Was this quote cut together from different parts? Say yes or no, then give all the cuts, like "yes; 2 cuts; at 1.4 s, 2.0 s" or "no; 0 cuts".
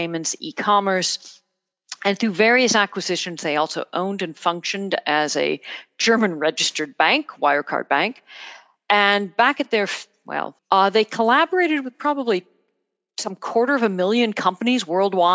yes; 1 cut; at 10.6 s